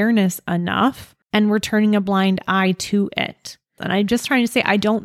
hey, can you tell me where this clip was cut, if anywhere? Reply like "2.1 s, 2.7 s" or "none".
1.2 s, 3.8 s